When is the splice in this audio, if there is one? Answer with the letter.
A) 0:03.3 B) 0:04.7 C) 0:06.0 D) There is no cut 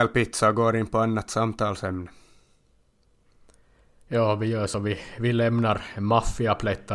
D